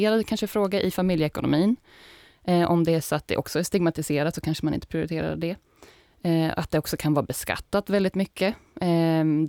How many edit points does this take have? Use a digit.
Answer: 0